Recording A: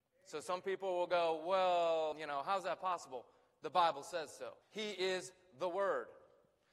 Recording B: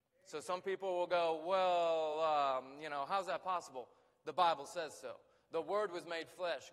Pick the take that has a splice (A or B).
A